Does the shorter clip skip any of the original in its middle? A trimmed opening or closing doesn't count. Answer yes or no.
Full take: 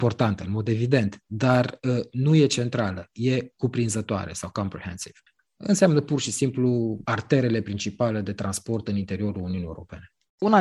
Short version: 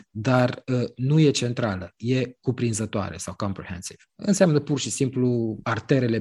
yes